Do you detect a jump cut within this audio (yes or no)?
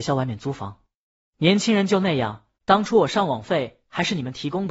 yes